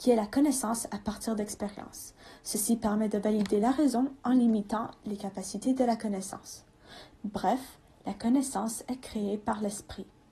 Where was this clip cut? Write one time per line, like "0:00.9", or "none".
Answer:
0:07.1